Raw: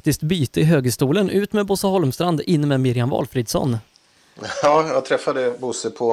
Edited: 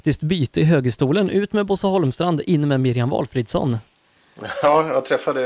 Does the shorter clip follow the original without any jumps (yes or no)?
yes